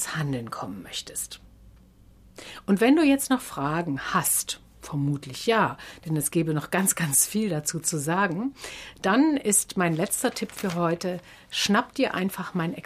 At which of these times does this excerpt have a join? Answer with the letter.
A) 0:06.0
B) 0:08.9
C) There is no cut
C